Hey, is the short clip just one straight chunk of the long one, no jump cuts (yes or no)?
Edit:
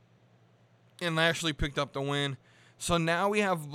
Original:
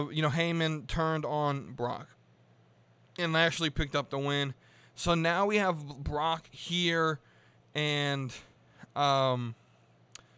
yes